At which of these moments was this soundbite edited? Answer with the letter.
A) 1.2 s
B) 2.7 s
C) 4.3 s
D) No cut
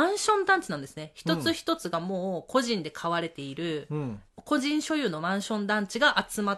C